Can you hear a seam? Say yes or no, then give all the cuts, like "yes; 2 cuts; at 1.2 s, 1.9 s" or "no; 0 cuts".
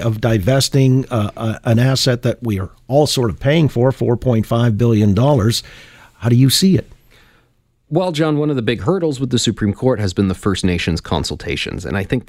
no; 0 cuts